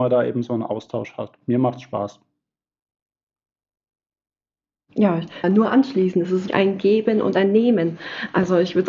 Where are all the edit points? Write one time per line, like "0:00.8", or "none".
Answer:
0:05.4
0:06.5